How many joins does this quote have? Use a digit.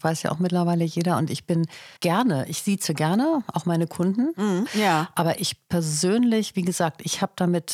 2